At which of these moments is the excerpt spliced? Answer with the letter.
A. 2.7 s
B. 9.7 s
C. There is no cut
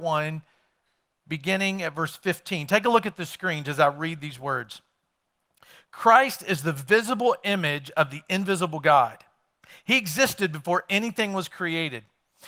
C